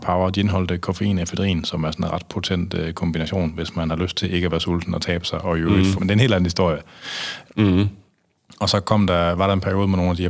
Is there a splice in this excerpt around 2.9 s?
no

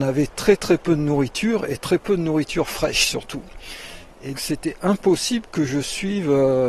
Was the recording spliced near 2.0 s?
no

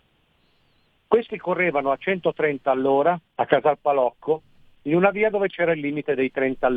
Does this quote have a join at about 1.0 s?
yes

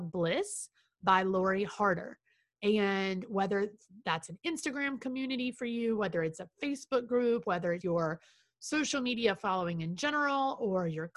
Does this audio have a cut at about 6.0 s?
no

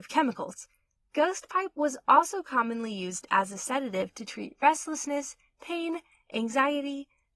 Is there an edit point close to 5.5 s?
no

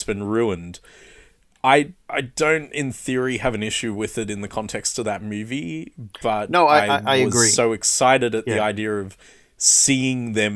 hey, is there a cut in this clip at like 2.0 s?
yes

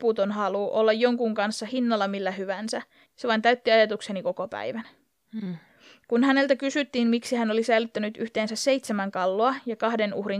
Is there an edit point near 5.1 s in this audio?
no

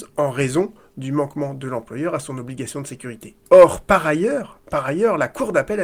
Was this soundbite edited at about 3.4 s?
yes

